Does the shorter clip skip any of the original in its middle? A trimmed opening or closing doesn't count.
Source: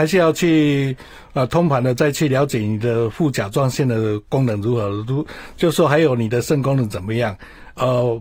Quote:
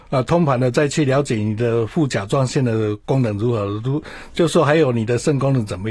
no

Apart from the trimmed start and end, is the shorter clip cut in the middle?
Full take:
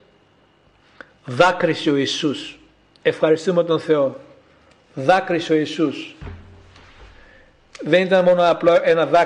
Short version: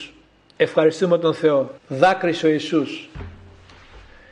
yes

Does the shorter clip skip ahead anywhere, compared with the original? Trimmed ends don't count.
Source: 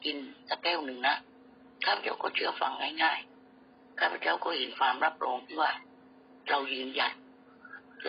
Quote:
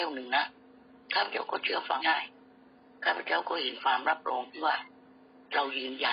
yes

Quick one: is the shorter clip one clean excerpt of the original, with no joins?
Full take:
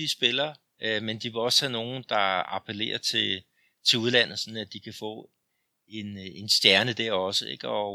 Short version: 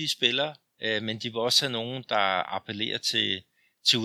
yes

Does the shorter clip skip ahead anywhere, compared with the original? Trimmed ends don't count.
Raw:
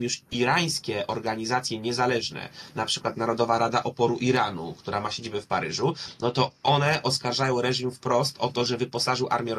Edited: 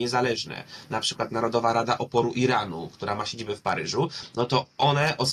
no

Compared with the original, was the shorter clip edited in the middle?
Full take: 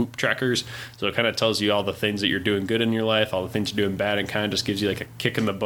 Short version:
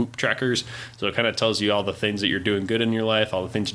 no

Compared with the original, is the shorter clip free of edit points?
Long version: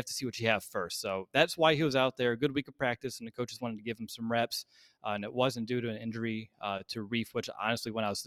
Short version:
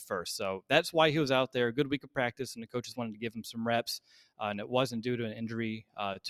yes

